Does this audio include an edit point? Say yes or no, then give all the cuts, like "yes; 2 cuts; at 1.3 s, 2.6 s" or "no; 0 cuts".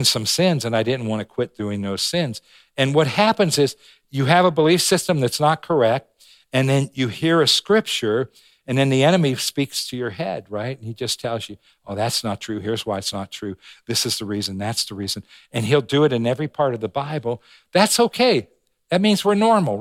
no; 0 cuts